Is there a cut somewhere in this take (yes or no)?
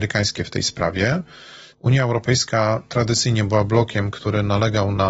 yes